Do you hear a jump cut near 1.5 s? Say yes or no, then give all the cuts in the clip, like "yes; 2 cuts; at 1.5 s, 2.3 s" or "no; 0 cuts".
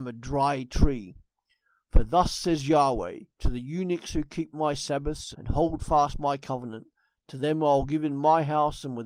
no; 2 cuts; at 3.3 s, 5.3 s